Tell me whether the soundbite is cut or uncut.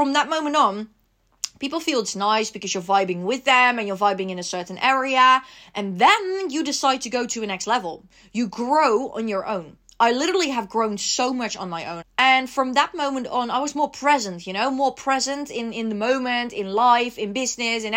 cut